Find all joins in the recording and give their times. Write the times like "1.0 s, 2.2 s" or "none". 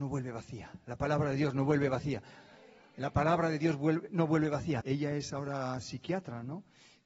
4.8 s